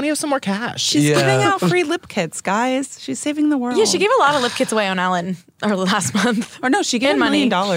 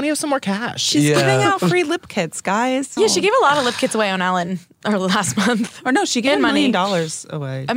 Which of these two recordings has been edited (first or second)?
second